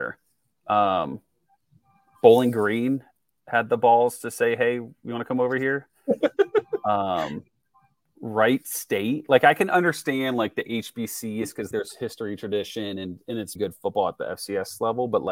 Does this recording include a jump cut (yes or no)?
yes